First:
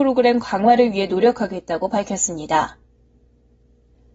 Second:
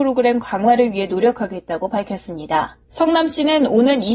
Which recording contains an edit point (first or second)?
second